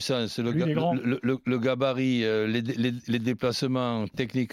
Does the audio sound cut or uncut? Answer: uncut